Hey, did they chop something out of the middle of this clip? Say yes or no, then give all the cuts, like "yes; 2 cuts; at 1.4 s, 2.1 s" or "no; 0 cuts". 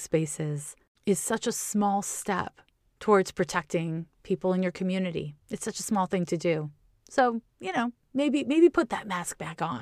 yes; 1 cut; at 5.4 s